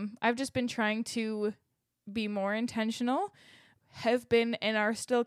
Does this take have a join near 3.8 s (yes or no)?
yes